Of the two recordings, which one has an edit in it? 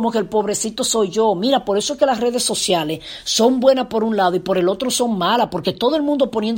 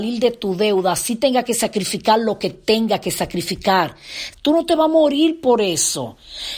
second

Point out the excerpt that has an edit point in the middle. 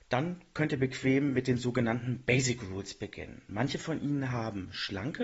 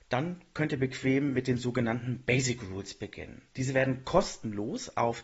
first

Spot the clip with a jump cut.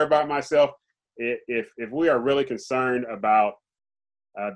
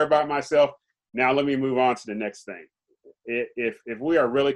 first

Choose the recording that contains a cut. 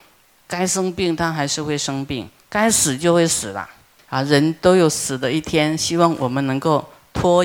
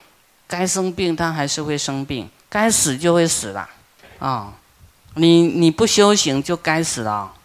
second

